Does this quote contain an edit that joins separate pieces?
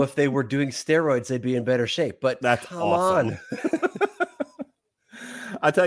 no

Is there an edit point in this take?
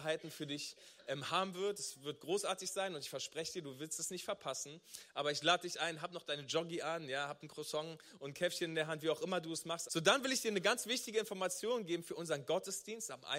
yes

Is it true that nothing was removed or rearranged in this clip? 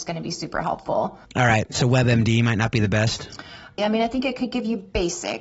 no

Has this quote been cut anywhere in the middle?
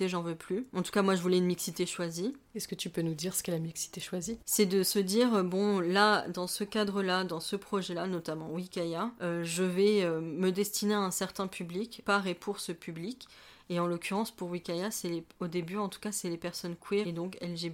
no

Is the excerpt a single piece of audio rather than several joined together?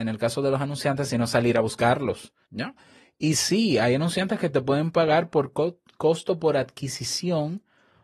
no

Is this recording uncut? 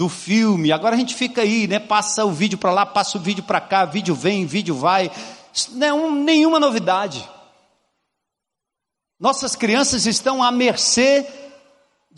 yes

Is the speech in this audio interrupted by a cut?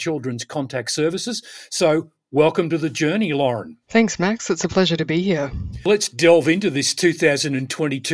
no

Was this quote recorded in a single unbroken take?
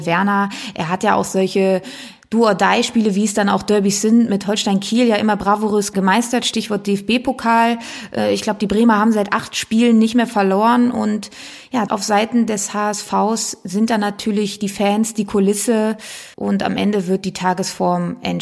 no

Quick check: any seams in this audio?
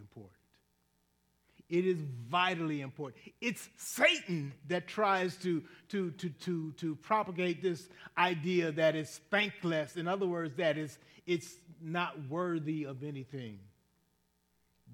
yes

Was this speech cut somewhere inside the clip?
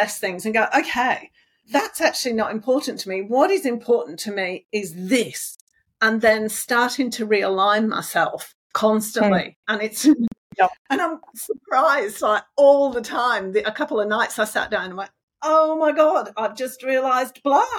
yes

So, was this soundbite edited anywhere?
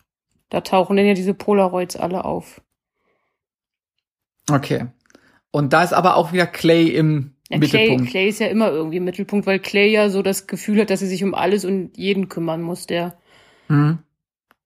no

